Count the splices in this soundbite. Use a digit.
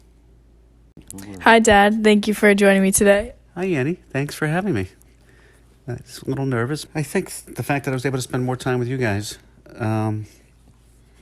1